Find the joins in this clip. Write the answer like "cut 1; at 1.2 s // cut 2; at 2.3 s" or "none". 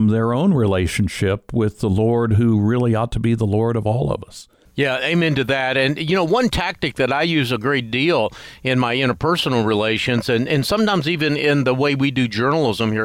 none